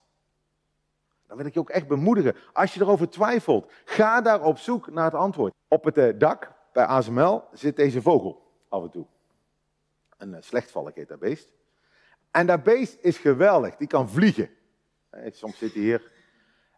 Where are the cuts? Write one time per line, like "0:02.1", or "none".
0:05.5